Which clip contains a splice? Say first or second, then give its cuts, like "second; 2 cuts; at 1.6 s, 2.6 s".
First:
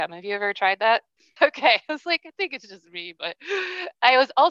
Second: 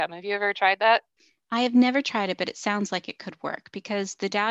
first; 1 cut; at 1.4 s